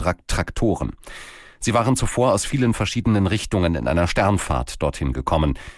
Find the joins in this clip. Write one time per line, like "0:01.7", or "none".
none